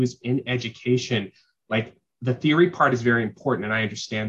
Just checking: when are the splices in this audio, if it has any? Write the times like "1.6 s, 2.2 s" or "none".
none